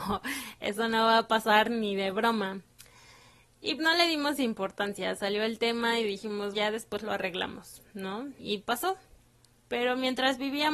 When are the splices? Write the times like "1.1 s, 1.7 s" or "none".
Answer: 3.8 s, 6.5 s